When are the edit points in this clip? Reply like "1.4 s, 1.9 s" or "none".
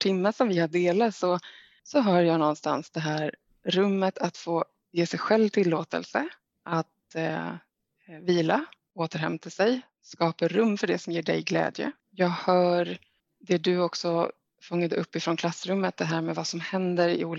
12.0 s